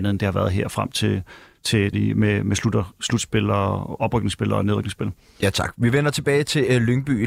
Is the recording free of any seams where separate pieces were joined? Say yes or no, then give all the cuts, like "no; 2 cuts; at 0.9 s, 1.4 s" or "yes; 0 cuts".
no; 1 cut; at 1.9 s